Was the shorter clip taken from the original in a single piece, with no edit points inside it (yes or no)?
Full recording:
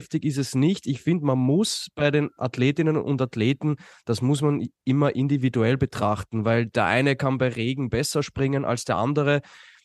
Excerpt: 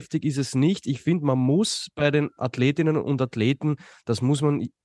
yes